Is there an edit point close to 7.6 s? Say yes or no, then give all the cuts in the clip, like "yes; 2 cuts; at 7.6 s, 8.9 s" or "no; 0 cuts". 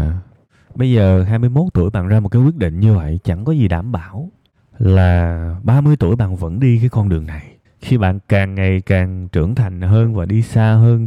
yes; 1 cut; at 7.6 s